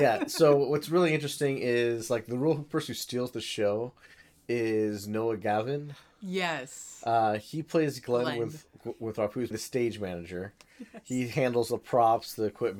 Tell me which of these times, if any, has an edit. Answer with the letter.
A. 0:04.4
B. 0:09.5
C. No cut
B